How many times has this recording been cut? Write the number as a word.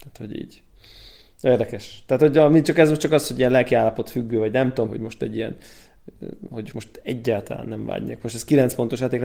two